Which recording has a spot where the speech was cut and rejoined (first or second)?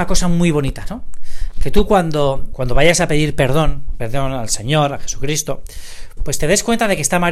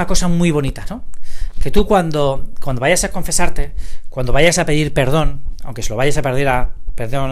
first